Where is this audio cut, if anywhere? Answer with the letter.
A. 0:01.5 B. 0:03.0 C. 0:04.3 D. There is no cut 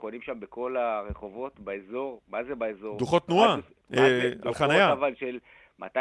D